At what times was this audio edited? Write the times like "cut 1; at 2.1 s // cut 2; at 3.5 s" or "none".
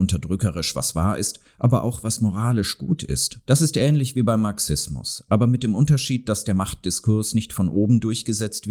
cut 1; at 3.4 s